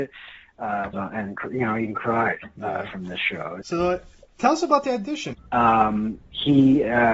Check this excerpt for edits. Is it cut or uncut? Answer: cut